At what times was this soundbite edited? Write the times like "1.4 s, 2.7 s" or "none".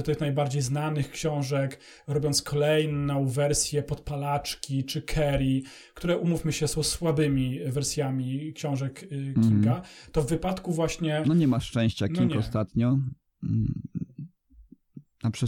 none